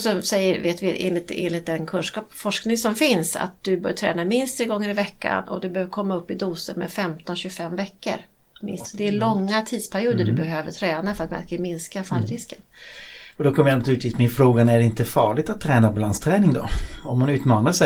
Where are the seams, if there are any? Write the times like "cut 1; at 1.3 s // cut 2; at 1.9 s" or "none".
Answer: cut 1; at 8.8 s // cut 2; at 13.3 s

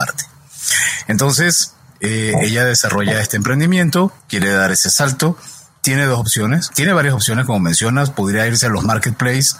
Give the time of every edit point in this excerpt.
cut 1; at 4.2 s // cut 2; at 6.7 s

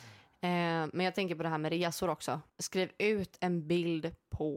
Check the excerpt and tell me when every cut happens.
cut 1; at 2.5 s

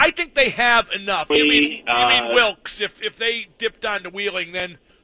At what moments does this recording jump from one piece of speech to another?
cut 1; at 1.3 s

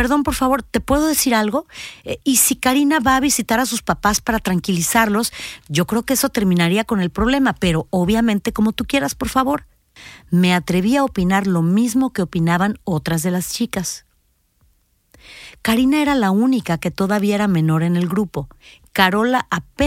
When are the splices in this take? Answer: none

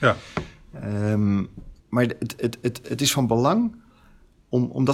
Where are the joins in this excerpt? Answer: cut 1; at 1.8 s // cut 2; at 2.8 s

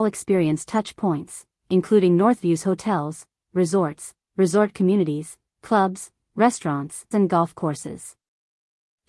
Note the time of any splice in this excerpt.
cut 1; at 7.1 s

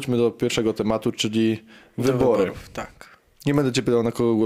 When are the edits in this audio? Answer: none

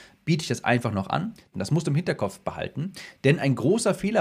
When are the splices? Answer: cut 1; at 1.5 s

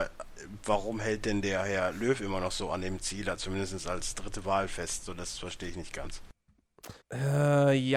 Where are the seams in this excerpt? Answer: cut 1; at 7.0 s

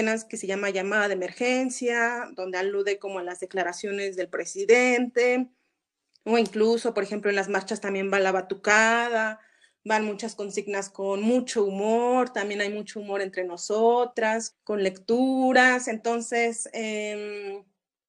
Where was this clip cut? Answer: cut 1; at 14.5 s

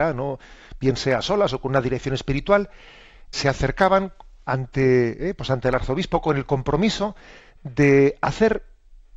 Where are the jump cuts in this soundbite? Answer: cut 1; at 3.3 s

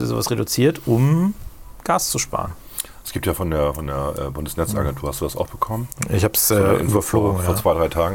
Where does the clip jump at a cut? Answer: none

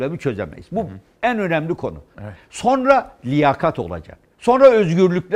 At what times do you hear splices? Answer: cut 1; at 2.1 s

